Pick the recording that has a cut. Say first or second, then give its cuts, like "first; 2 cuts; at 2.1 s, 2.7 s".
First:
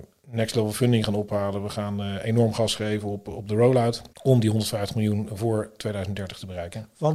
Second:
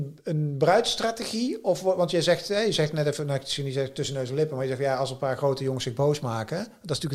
first; 1 cut; at 4.1 s